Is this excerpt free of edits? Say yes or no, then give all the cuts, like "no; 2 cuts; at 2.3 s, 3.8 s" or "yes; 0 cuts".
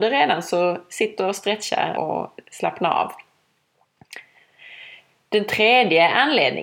no; 1 cut; at 1.9 s